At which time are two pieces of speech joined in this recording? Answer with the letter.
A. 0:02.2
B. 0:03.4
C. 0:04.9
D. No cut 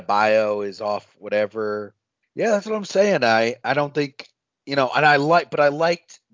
A